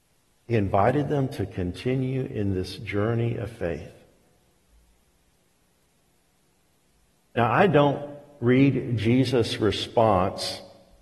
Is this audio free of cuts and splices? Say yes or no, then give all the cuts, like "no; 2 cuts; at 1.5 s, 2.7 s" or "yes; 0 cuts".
yes; 0 cuts